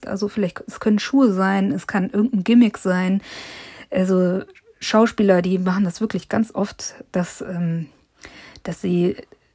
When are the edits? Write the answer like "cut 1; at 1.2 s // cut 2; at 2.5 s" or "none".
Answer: none

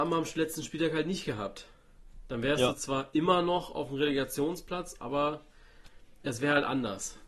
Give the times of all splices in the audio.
none

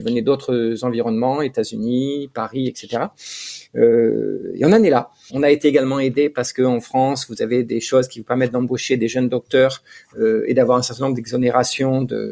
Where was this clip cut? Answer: cut 1; at 5.3 s

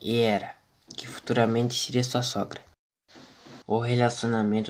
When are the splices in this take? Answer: cut 1; at 3.6 s

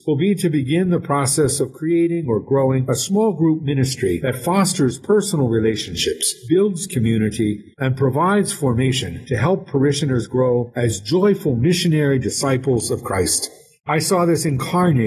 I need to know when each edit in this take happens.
none

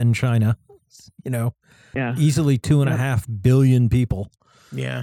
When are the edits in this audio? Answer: cut 1; at 1.9 s

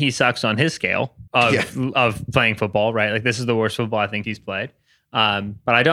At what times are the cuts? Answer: cut 1; at 1.3 s // cut 2; at 4.2 s

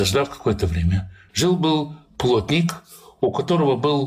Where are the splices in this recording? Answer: cut 1; at 1.3 s

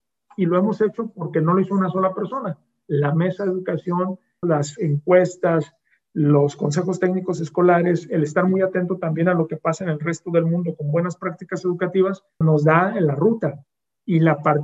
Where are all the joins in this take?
cut 1; at 4.4 s // cut 2; at 12.4 s

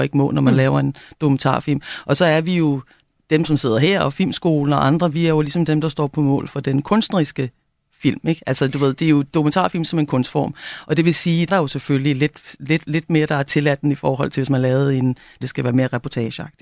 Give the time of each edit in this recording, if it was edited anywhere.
cut 1; at 11.5 s // cut 2; at 15.4 s

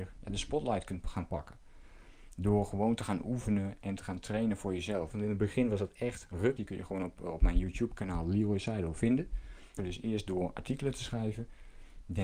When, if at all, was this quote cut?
cut 1; at 5.1 s // cut 2; at 6.6 s // cut 3; at 9.8 s

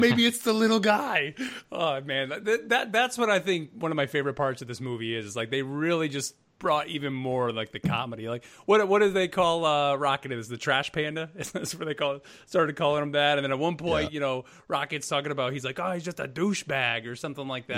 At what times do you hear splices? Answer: none

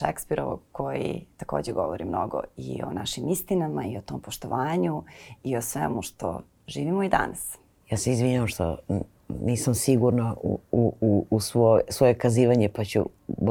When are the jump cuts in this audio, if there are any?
cut 1; at 7.8 s

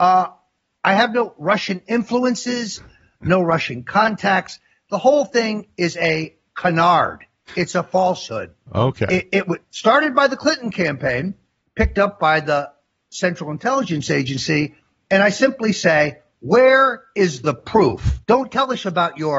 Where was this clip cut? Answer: cut 1; at 18.2 s

